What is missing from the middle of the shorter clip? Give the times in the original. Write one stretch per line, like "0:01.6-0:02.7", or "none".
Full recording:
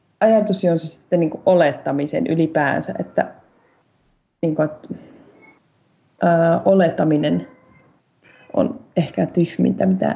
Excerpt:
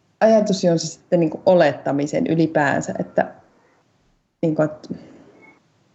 none